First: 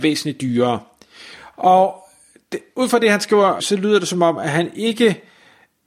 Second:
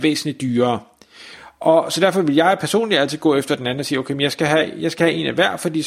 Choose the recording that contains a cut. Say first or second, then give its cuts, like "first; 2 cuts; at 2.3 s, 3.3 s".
first; 2 cuts; at 1.5 s, 3.6 s